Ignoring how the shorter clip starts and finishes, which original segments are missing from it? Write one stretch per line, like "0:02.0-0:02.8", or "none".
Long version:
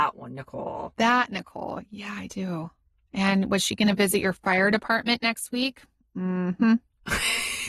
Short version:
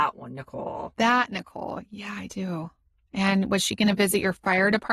none